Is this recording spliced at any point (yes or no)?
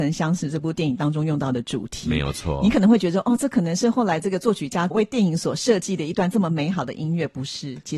no